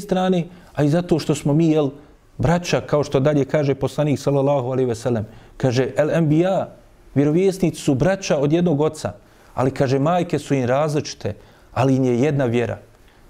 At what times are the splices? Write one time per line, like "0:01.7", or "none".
none